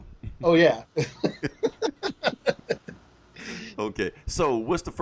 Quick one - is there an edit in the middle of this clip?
no; 0 cuts

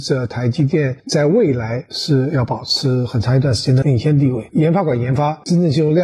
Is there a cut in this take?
yes; 1 cut; at 3.8 s

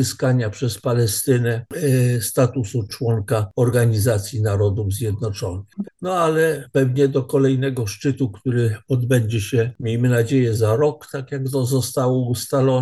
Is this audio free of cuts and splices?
no; 1 cut; at 5.8 s

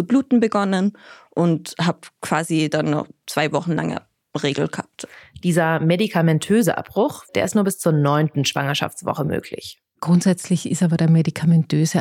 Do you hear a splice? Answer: yes; 1 cut; at 7.3 s

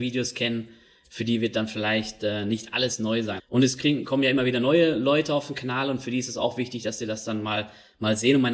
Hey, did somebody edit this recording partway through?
yes; 1 cut; at 3.4 s

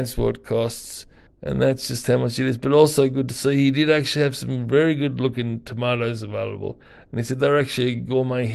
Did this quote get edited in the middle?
yes; 1 cut; at 1.3 s

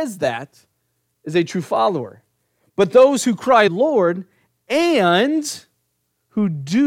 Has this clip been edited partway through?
yes; 1 cut; at 3.7 s

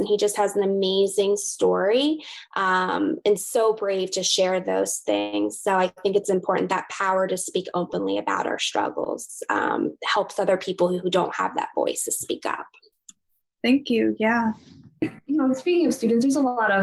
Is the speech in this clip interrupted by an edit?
no; 0 cuts

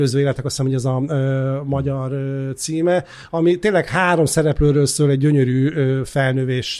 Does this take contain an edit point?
no; 0 cuts

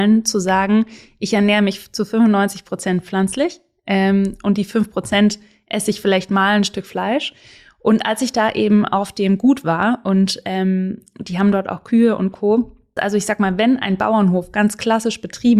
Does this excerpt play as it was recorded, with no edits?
no; 1 cut; at 13.0 s

